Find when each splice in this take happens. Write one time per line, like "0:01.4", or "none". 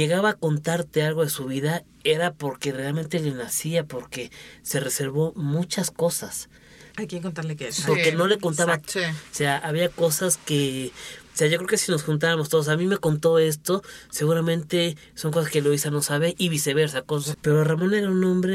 0:06.9
0:08.8
0:17.3